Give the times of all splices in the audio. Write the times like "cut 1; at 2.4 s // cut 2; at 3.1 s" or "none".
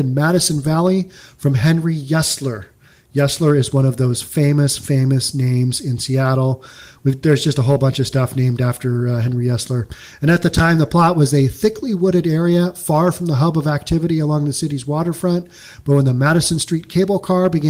none